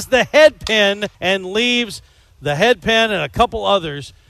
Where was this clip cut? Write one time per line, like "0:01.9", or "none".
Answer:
0:01.1